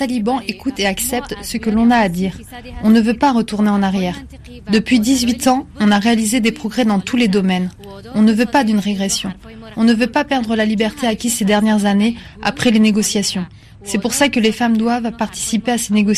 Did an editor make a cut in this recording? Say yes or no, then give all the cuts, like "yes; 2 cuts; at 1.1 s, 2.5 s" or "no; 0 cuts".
no; 0 cuts